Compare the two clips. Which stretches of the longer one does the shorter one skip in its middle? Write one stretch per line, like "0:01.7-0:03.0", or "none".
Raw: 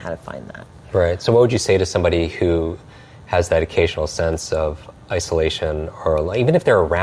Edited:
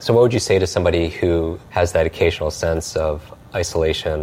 0:02.8-0:03.2